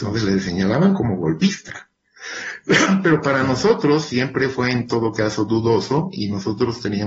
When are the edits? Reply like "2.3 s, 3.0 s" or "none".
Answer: none